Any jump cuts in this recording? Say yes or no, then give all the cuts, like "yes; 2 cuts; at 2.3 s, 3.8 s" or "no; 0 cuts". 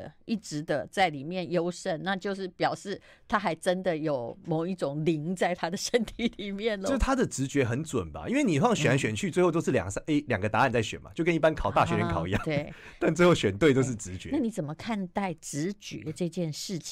no; 0 cuts